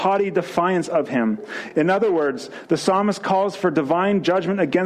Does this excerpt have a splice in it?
no; 0 cuts

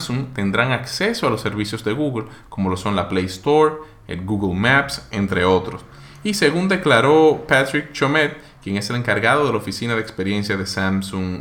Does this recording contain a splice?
no; 0 cuts

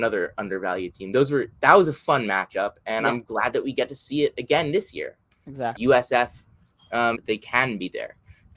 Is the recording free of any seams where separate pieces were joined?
no; 2 cuts; at 5.7 s, 7.1 s

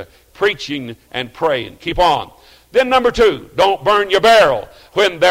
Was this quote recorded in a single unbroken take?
yes; 0 cuts

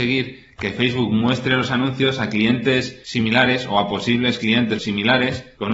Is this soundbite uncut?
no; 1 cut; at 4.8 s

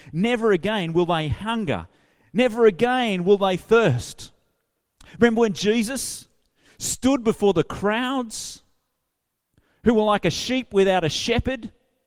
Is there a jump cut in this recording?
no; 0 cuts

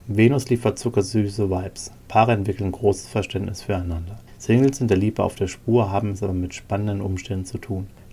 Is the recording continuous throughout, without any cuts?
no; 1 cut; at 4.4 s

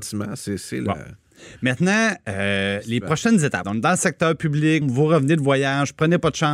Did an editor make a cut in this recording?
yes; 2 cuts; at 3.6 s, 4.8 s

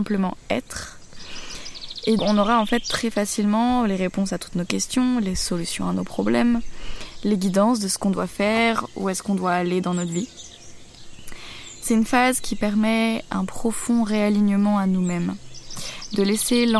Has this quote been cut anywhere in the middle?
yes; 1 cut; at 2.2 s

